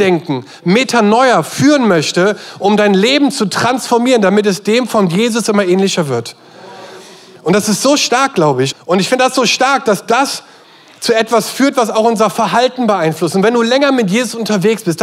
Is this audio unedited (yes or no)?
no